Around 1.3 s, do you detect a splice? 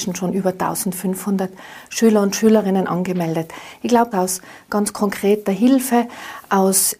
no; 1 cut; at 4.1 s

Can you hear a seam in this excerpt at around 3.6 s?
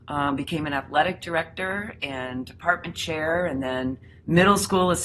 no; 0 cuts

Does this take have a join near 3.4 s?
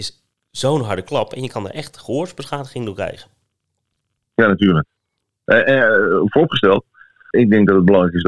no; 1 cut; at 7.3 s

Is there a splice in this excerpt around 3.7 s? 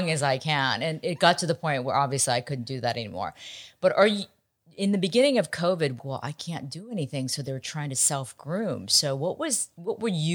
no; 1 cut; at 6.0 s

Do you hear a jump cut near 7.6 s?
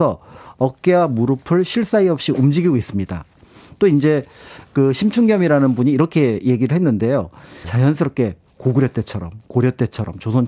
yes; 1 cut; at 7.6 s

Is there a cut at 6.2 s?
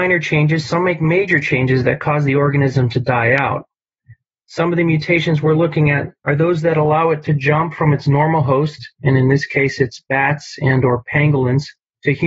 yes; 1 cut; at 6.2 s

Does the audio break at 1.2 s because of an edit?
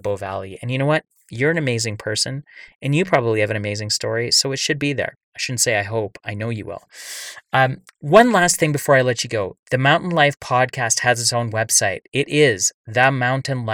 no; 1 cut; at 5.3 s

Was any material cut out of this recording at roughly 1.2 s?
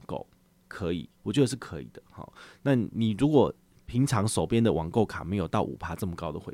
yes; 1 cut; at 1.2 s

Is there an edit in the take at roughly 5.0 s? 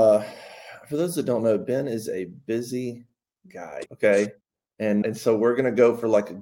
yes; 2 cuts; at 3.9 s, 5.0 s

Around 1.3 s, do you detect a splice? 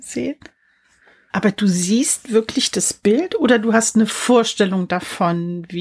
yes; 1 cut; at 1.3 s

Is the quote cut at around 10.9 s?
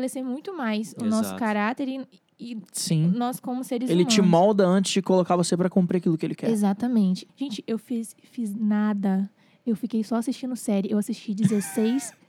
no; 1 cut; at 7.3 s

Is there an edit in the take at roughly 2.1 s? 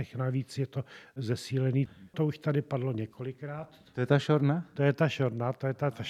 yes; 1 cut; at 2.1 s

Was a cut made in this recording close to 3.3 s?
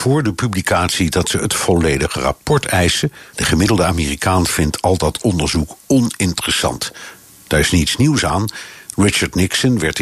yes; 1 cut; at 3.3 s

